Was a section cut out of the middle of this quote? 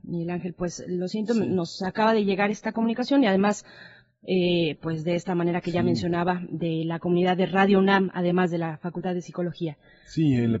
yes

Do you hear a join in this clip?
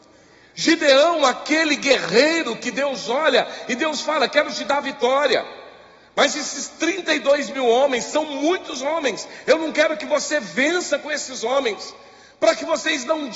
no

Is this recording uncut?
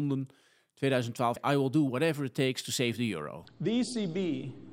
no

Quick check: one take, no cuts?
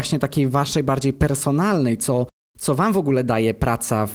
yes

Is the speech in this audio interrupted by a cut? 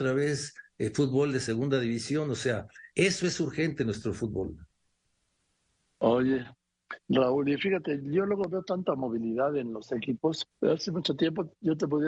yes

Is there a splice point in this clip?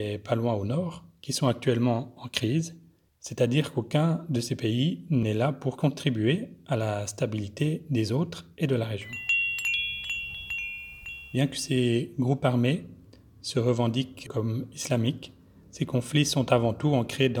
no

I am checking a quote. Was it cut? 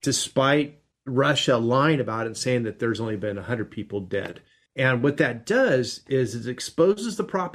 no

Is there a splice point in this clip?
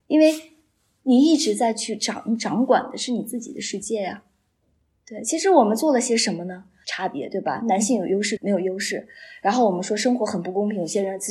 yes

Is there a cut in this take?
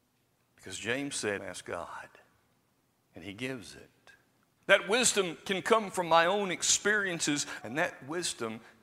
yes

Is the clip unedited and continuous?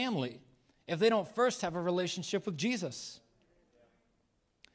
yes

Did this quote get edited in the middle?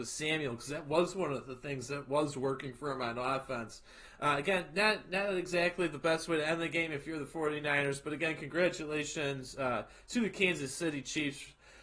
no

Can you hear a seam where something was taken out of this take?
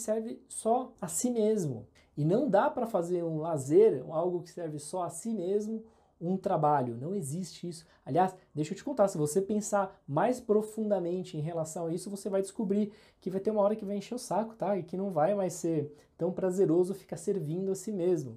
no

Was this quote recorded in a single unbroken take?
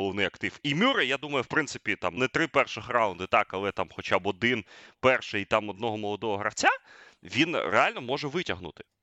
no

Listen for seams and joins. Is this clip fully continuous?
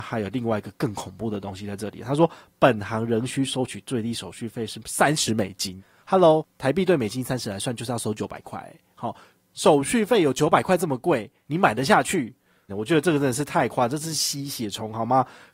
no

